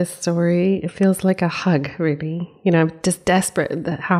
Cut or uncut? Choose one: uncut